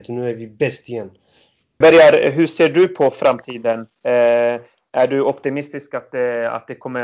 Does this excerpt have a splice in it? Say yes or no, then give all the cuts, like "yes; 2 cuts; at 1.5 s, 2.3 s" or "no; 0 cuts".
yes; 1 cut; at 1.8 s